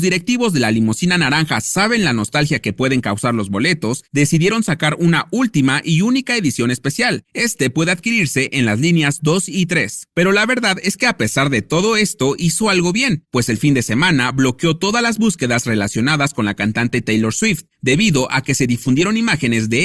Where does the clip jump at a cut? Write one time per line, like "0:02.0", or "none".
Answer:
0:10.1